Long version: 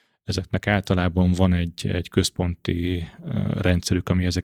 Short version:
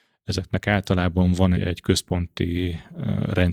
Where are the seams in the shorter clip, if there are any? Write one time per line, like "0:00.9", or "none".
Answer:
0:01.5